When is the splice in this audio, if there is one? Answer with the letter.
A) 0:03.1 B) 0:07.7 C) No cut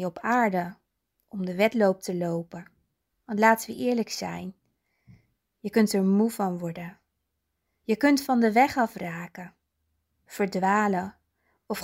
A